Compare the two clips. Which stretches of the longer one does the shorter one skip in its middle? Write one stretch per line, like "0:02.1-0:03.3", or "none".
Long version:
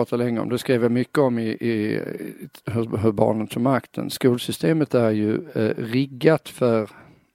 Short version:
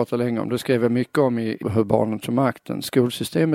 0:01.6-0:02.9